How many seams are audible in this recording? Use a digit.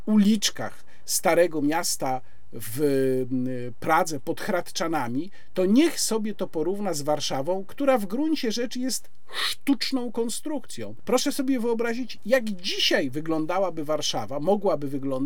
1